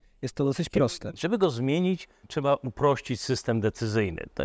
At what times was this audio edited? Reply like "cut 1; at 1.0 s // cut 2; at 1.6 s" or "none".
cut 1; at 1.1 s